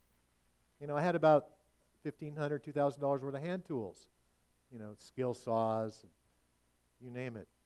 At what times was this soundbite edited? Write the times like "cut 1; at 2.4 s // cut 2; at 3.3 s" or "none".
none